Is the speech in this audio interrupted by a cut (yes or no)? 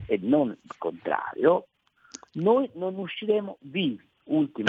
no